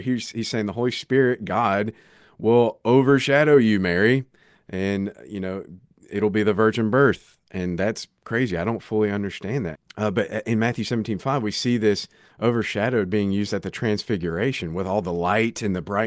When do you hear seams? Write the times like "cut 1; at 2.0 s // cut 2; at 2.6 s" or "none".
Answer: cut 1; at 9.7 s